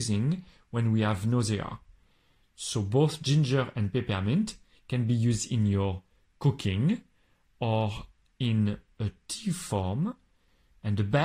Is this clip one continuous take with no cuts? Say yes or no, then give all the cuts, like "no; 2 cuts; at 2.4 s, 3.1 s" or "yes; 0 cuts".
yes; 0 cuts